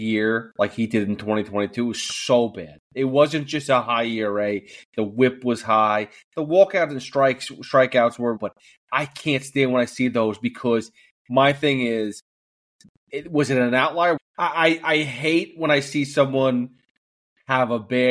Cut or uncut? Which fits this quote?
cut